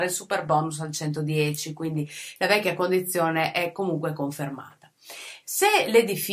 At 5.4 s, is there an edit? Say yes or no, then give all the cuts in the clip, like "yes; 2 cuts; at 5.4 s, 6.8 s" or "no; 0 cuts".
yes; 1 cut; at 5.4 s